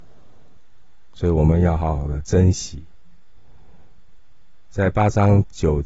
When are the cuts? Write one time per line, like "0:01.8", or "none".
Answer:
none